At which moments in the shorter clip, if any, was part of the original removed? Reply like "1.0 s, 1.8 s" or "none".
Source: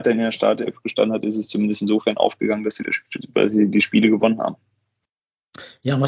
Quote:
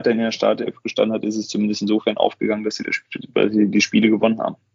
none

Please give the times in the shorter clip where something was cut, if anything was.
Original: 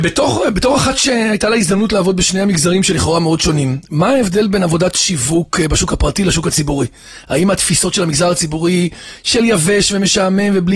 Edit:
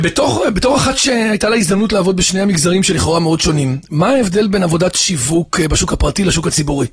none

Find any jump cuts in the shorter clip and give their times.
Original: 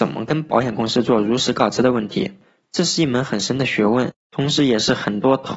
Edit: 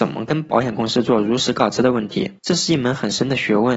2.4 s

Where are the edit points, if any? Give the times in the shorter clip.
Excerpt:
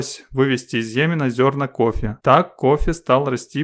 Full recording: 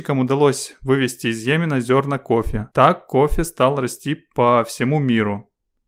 none

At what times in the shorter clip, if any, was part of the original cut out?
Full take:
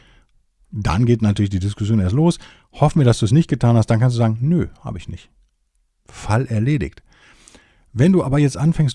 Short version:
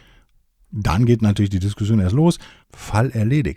2.6 s

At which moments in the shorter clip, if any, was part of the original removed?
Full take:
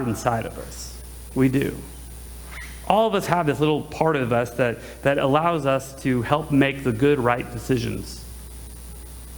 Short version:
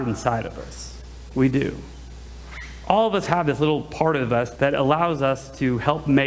4.5 s

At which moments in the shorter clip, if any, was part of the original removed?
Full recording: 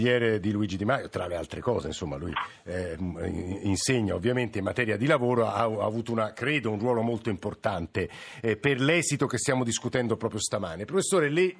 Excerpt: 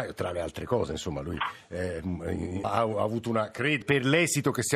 2.6 s, 3.8 s

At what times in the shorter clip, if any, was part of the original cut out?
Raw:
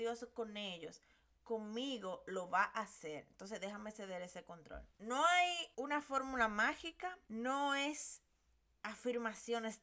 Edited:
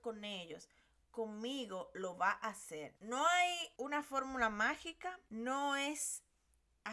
3.0 s

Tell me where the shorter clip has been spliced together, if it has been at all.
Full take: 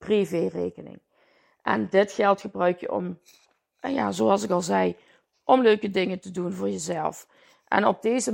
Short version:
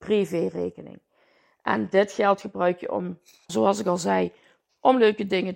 3.5 s

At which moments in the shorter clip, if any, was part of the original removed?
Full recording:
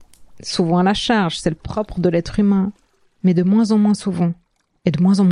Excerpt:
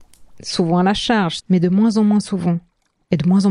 1.4 s

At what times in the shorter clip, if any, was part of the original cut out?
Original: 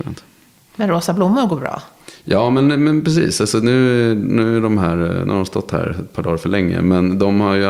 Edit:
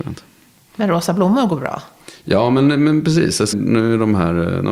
3.5 s

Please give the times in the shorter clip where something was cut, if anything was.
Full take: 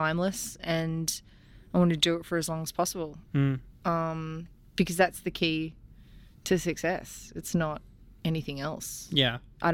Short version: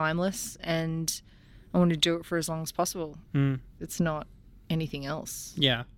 3.8 s

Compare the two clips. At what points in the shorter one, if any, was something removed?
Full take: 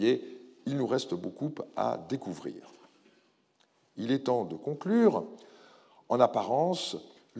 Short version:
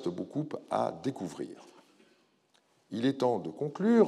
none

